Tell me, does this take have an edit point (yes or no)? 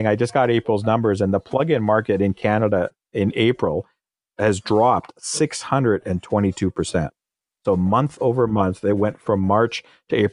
no